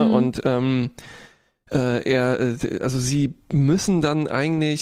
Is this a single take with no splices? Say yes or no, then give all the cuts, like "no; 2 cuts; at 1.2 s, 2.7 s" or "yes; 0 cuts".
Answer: yes; 0 cuts